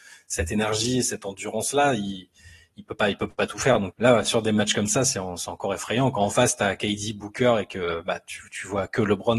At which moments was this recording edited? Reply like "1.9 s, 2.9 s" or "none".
3.9 s